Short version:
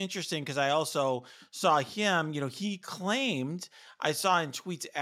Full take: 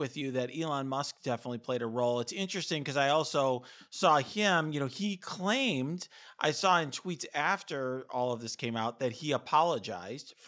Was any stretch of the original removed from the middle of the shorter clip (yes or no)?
no